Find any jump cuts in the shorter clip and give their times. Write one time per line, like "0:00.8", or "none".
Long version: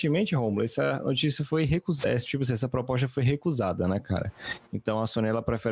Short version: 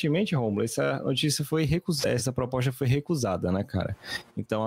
0:02.2